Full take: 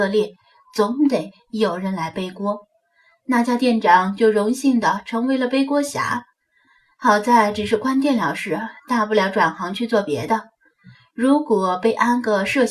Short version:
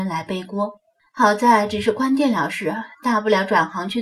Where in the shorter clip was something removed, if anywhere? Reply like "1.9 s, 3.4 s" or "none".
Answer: 1.0 s